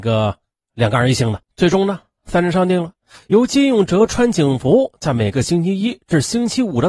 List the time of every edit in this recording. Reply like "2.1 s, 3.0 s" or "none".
1.4 s